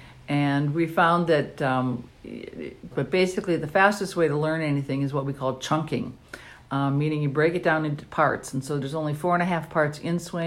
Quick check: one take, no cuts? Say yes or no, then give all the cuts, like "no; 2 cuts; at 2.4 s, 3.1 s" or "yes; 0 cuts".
no; 1 cut; at 2.9 s